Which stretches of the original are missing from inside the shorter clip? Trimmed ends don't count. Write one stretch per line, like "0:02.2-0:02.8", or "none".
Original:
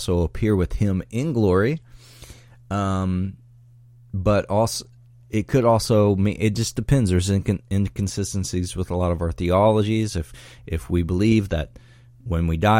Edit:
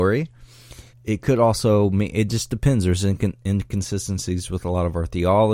0:02.4-0:05.2